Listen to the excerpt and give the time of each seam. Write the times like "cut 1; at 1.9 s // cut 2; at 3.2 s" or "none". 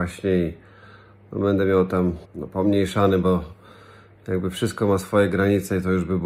cut 1; at 2.2 s